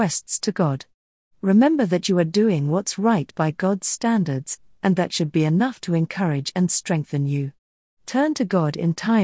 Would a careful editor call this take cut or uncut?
cut